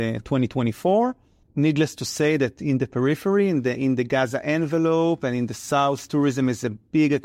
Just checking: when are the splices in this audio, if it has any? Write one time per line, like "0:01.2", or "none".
0:01.4